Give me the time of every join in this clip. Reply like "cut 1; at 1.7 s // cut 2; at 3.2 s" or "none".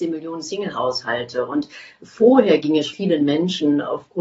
cut 1; at 2.9 s